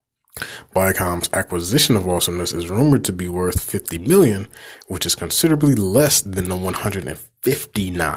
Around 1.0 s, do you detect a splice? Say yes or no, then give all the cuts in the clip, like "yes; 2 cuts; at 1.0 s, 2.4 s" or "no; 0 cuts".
no; 0 cuts